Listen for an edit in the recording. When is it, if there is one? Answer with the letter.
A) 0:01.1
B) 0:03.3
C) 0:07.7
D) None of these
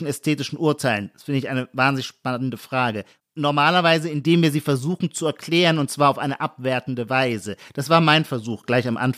D